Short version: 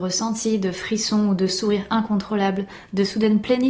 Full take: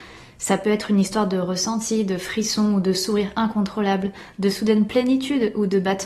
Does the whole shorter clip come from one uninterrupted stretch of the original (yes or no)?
yes